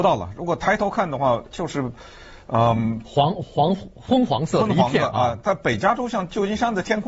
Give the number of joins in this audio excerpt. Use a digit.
1